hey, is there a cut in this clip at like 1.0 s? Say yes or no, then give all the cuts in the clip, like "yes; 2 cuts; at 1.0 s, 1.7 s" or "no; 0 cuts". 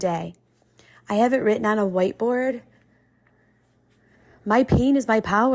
no; 0 cuts